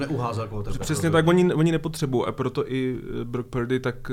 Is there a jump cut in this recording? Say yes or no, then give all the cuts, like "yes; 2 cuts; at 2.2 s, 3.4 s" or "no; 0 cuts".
no; 0 cuts